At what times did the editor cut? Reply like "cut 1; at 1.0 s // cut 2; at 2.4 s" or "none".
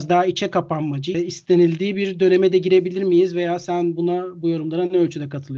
cut 1; at 1.1 s